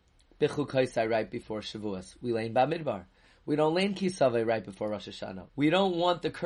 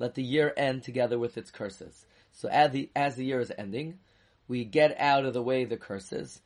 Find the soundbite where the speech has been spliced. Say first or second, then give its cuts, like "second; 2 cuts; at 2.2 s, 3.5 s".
first; 1 cut; at 5.5 s